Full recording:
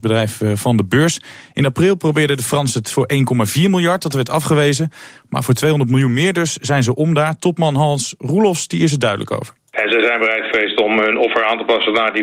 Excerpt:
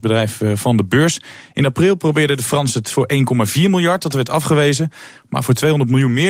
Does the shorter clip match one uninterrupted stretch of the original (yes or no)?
yes